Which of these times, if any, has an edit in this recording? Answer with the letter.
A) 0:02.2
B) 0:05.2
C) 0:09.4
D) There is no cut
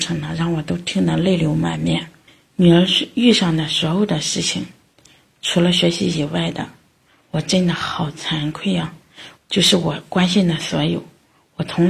C